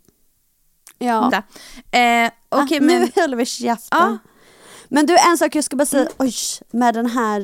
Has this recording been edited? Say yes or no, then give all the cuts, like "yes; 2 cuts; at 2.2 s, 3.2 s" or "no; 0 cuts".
yes; 1 cut; at 1.3 s